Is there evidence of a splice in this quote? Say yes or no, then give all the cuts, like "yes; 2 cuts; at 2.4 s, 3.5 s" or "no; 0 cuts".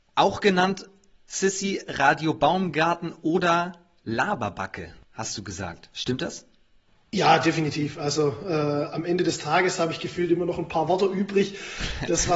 no; 0 cuts